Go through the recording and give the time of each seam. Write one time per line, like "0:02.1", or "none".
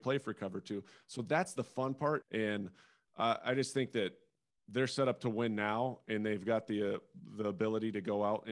0:02.2